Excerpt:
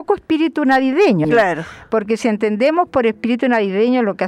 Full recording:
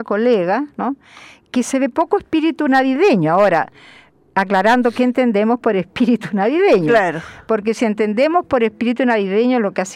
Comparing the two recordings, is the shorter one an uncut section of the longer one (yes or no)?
no